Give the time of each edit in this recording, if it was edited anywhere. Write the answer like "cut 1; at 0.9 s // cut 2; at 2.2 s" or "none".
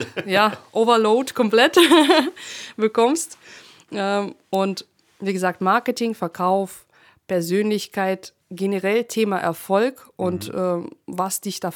cut 1; at 8.4 s

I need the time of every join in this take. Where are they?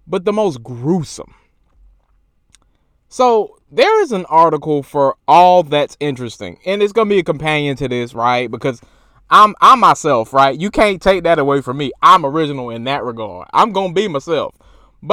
none

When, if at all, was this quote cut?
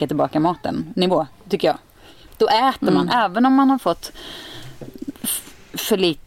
none

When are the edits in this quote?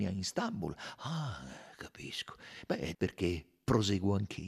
cut 1; at 2.9 s

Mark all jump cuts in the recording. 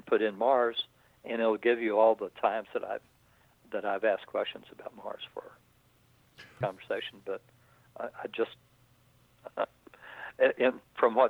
cut 1; at 6.6 s // cut 2; at 9.4 s

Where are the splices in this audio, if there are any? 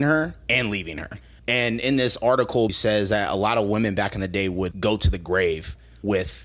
cut 1; at 1.4 s // cut 2; at 2.7 s // cut 3; at 4.7 s

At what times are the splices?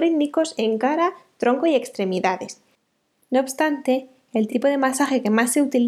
none

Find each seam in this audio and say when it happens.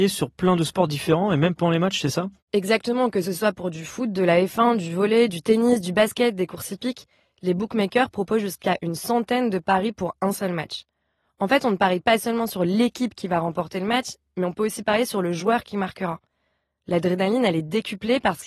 none

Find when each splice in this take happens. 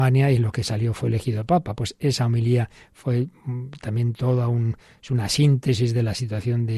none

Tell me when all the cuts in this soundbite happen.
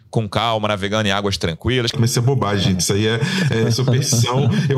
cut 1; at 1.9 s

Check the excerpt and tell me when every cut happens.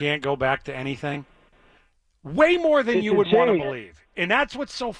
none

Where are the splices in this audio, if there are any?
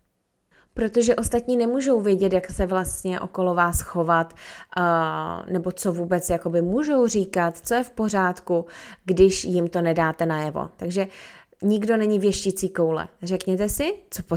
cut 1; at 10.8 s

